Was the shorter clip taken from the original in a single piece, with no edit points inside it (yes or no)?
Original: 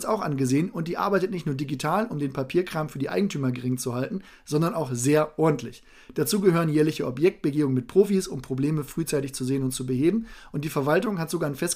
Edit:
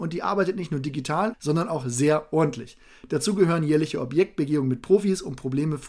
no